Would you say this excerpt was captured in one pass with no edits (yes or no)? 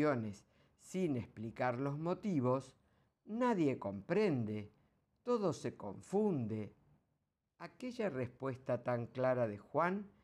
no